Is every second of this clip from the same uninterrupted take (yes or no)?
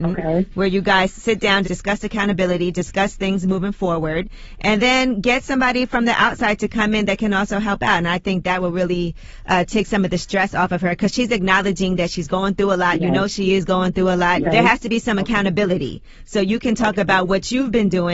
no